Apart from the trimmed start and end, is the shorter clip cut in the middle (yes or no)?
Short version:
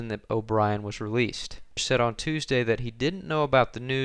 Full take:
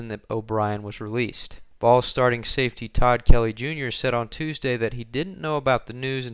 yes